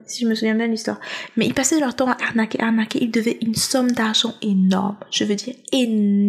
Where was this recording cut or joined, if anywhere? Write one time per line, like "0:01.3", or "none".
0:02.2